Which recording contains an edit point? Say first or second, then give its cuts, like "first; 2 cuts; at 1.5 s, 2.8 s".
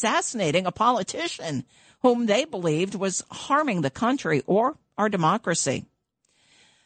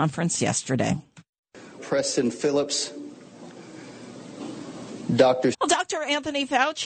second; 2 cuts; at 1.8 s, 5.5 s